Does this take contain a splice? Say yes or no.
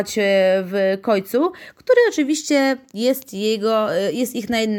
no